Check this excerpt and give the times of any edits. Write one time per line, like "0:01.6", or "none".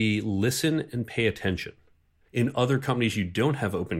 0:02.3

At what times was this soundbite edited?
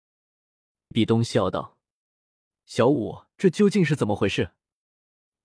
0:00.9
0:03.3

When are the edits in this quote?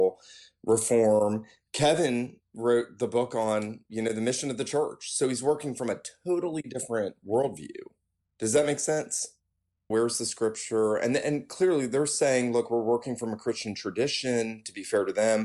0:09.9

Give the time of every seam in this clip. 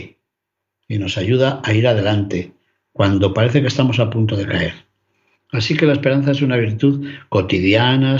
0:05.3

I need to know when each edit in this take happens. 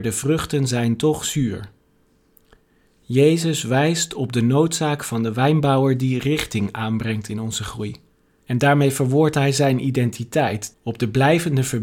0:08.4
0:10.7

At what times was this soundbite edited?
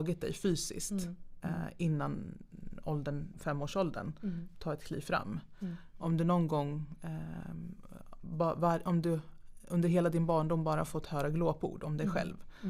0:03.3

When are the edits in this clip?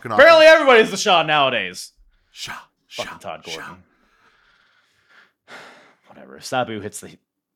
none

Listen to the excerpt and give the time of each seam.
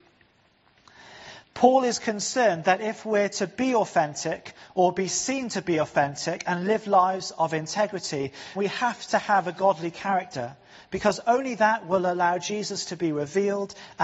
0:01.4
0:08.6

